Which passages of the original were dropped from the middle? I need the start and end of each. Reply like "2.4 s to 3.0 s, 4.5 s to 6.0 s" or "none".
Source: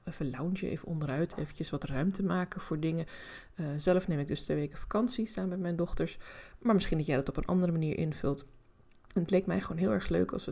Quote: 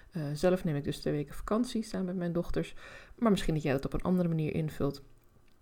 none